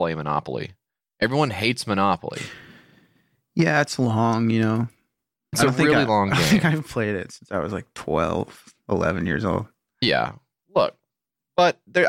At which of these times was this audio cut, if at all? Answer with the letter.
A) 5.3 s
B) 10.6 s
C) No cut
C